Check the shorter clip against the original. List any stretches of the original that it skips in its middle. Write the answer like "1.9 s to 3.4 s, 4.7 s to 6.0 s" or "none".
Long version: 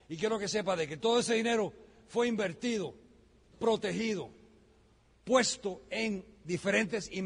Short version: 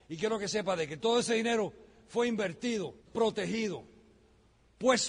3.0 s to 3.5 s